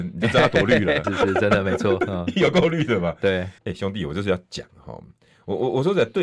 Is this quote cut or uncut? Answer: cut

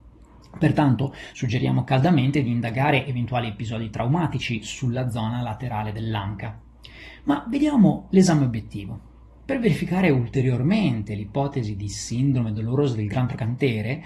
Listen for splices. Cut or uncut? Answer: uncut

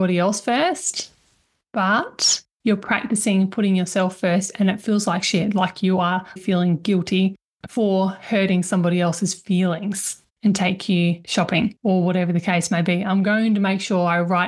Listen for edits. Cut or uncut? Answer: cut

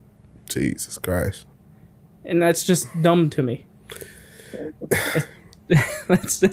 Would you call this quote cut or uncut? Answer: uncut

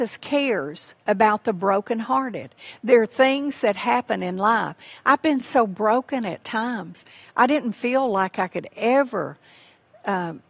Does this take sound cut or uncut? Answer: uncut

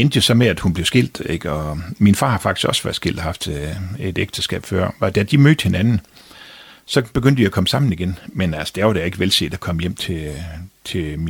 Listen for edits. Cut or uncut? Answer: uncut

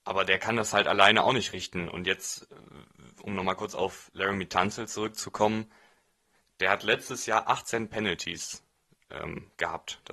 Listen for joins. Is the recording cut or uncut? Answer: uncut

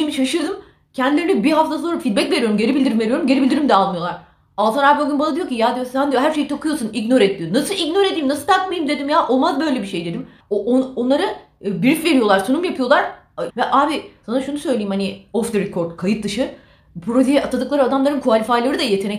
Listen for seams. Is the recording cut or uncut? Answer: cut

